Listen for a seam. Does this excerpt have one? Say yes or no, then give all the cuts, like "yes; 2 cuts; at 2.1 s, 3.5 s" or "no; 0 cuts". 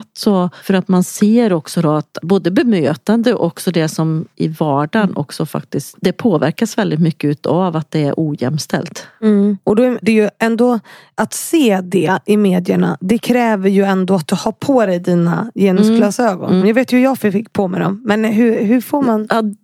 yes; 3 cuts; at 4.3 s, 10.0 s, 16.6 s